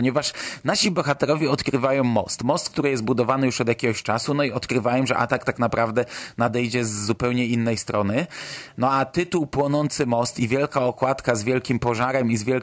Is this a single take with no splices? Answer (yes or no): yes